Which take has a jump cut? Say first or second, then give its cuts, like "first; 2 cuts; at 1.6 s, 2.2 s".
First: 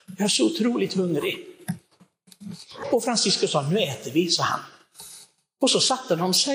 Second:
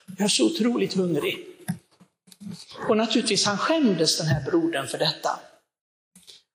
first; 1 cut; at 2.8 s